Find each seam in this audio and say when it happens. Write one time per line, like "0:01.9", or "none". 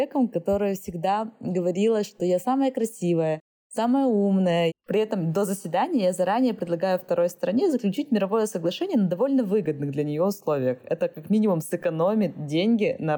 0:04.7